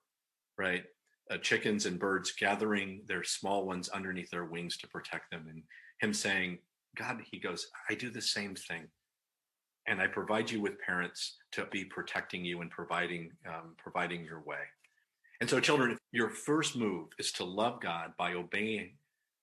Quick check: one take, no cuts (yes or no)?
no